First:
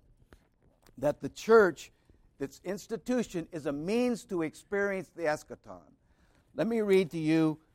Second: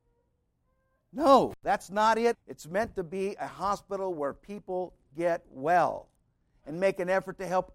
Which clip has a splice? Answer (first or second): second